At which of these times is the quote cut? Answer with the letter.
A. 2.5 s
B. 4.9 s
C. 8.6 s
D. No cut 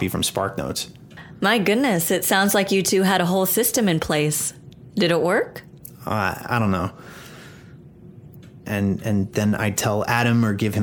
C